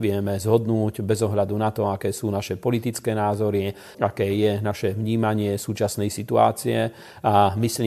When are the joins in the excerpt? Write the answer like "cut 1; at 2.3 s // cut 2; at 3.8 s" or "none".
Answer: cut 1; at 3.9 s